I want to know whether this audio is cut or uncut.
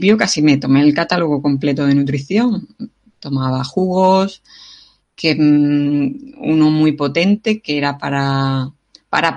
uncut